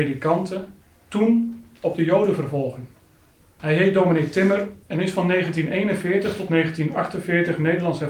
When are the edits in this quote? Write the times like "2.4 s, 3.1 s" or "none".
3.6 s, 4.8 s